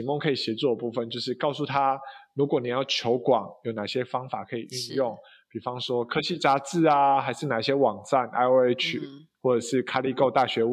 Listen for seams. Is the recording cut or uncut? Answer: uncut